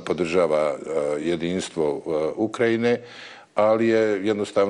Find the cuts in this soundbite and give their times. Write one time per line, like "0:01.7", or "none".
none